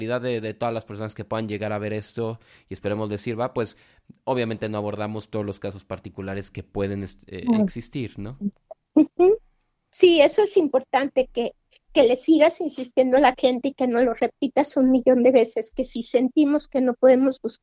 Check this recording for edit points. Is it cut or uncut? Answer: uncut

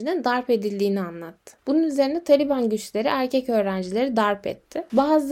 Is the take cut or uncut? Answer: cut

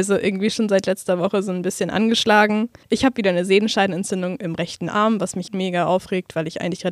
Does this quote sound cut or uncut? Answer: cut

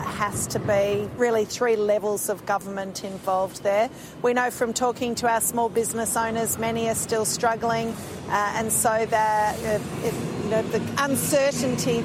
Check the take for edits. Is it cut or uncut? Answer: uncut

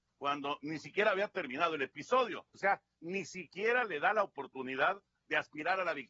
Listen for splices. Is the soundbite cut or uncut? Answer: cut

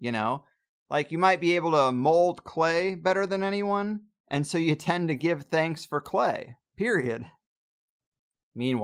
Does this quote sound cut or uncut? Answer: uncut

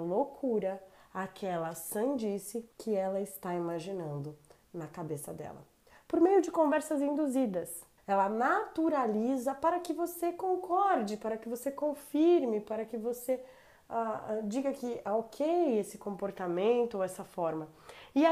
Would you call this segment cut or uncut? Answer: cut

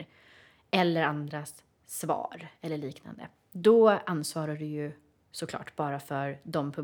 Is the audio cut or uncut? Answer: uncut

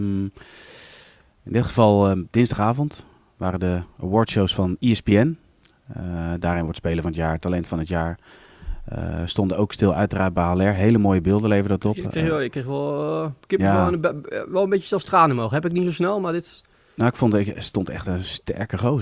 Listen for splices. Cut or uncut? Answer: uncut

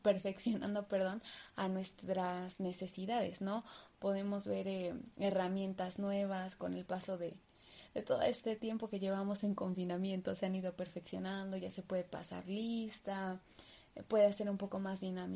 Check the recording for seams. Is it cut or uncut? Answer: uncut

